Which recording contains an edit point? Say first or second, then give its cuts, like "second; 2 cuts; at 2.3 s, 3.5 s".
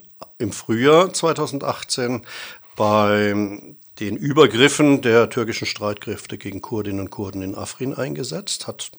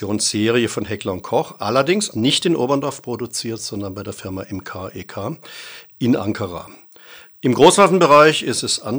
second; 1 cut; at 2.1 s